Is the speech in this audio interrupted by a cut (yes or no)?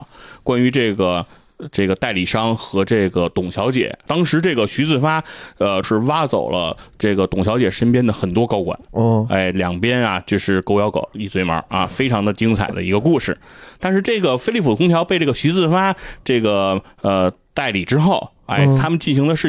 yes